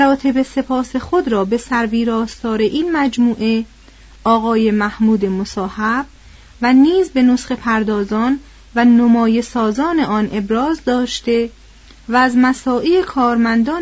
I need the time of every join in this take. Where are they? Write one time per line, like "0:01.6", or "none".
none